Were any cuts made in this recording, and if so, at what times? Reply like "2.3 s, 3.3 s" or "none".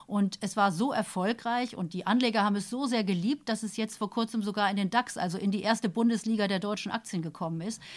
none